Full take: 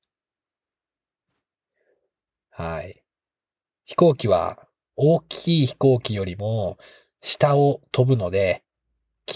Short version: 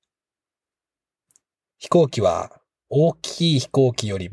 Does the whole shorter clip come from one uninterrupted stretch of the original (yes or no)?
no